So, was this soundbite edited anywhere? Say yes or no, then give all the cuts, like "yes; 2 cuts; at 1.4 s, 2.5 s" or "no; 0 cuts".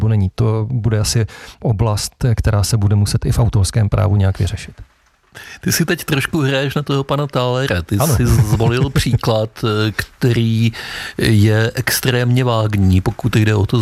no; 0 cuts